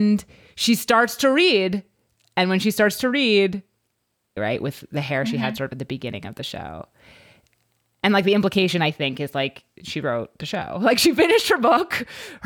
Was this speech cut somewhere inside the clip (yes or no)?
yes